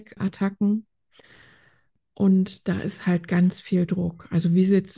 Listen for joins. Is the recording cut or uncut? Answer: uncut